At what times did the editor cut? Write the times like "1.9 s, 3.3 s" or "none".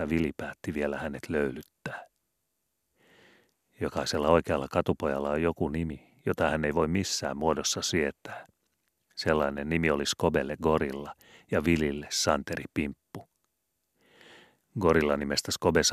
none